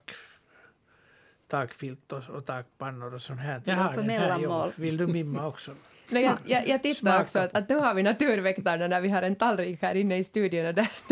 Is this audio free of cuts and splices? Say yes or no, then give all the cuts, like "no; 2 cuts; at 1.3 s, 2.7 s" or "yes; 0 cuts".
no; 2 cuts; at 3.6 s, 7.5 s